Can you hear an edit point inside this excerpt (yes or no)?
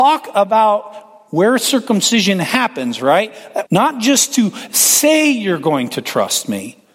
yes